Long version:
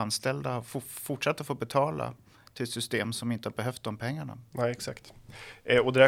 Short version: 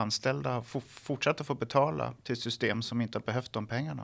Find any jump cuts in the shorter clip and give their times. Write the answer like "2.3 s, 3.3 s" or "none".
2.2 s